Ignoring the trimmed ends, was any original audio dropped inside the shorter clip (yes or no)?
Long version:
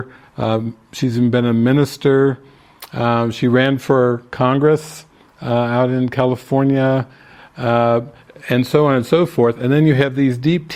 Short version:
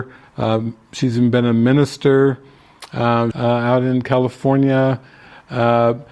yes